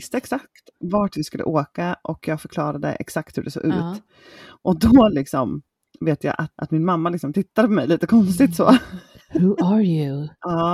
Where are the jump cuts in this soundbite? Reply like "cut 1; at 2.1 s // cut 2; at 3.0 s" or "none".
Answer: none